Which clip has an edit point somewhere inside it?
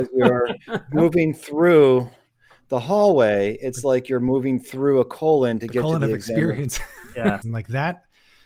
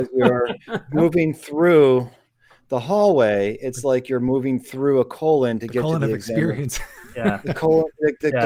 first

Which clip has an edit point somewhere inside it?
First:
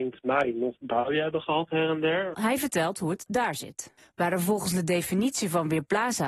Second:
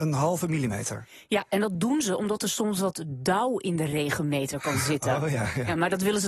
first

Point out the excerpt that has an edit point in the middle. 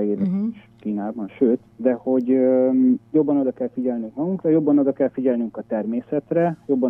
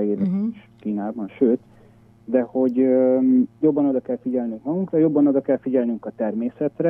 first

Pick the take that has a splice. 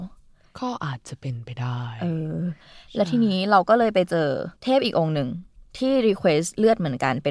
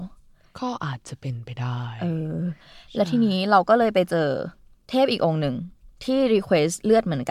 first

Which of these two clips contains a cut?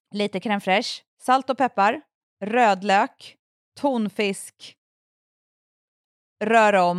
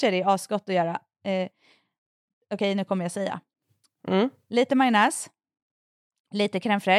first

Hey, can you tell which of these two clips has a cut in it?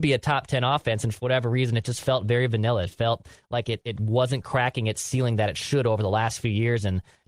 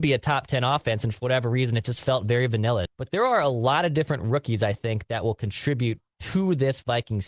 second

